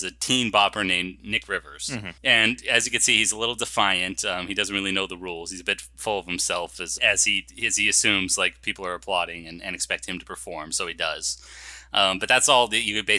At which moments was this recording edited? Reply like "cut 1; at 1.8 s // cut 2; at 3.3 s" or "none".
cut 1; at 2.2 s // cut 2; at 7.0 s